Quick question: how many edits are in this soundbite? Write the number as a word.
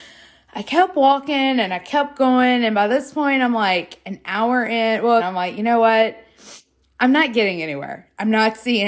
one